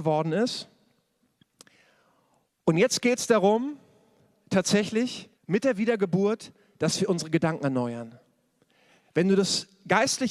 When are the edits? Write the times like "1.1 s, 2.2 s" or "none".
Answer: 5.3 s

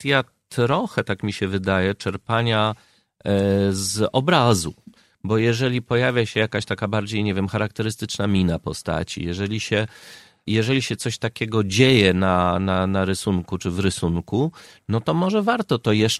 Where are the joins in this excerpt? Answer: none

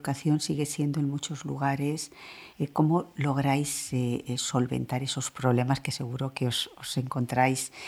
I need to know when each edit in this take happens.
2.5 s

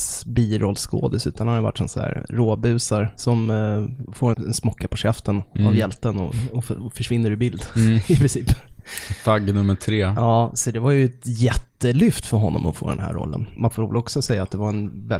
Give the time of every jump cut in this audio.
4.3 s

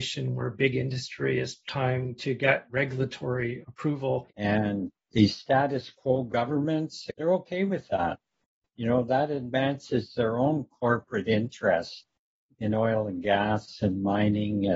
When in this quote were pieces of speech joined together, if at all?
4.3 s, 7.1 s

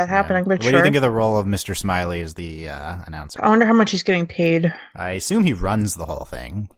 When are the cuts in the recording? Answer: 3.4 s

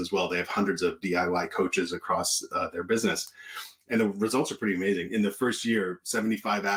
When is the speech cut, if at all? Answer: none

